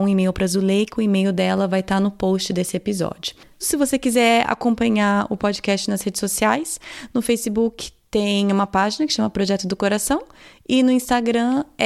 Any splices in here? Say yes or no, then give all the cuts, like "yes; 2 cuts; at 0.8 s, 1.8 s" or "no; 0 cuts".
yes; 1 cut; at 3.6 s